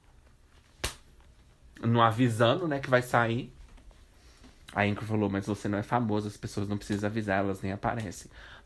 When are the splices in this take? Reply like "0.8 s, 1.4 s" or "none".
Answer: none